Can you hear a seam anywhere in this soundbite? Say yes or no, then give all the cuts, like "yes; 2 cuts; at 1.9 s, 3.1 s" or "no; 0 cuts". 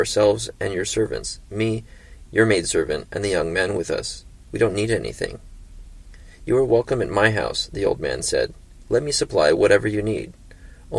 no; 0 cuts